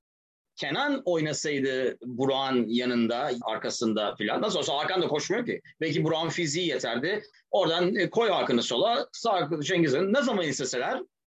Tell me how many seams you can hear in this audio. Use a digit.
2